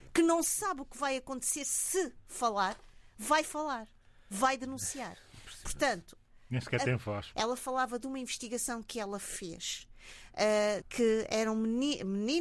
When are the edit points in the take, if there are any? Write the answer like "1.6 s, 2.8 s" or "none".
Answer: 7.3 s, 10.8 s